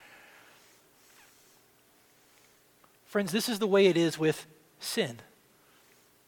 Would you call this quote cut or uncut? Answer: uncut